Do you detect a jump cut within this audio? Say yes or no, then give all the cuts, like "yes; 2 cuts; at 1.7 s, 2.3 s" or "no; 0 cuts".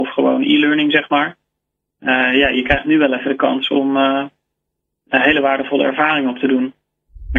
no; 0 cuts